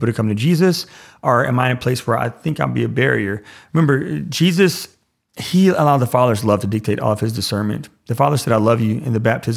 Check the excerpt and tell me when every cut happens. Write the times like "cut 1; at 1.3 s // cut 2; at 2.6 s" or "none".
none